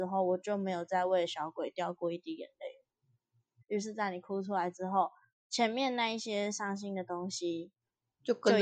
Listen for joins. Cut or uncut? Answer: cut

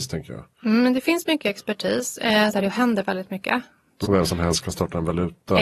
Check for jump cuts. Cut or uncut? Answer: cut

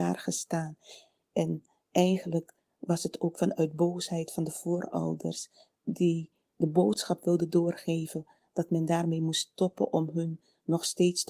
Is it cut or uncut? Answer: cut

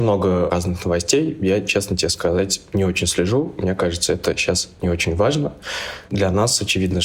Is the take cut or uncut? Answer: uncut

